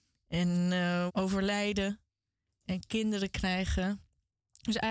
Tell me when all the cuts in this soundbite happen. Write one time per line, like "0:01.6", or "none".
0:01.1